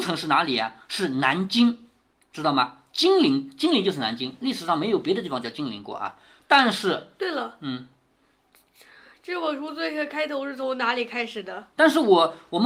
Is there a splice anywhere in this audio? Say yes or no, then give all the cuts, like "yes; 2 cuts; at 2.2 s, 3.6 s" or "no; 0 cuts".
yes; 1 cut; at 11.7 s